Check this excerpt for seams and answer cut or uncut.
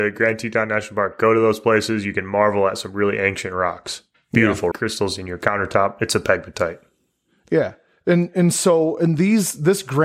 cut